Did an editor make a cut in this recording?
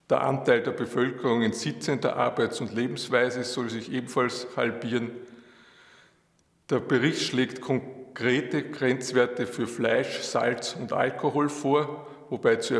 no; 0 cuts

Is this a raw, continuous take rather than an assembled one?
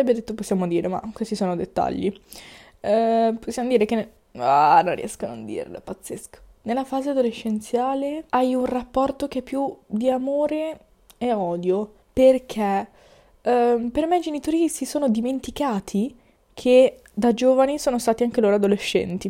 no; 2 cuts; at 8.3 s, 12.0 s

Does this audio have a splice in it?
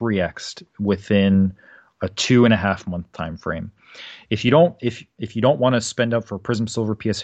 no; 0 cuts

